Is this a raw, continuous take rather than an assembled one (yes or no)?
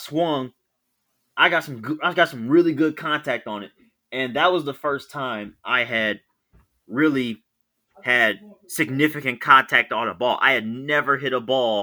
yes